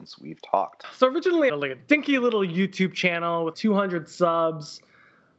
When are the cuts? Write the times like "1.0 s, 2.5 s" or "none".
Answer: 1.5 s, 3.5 s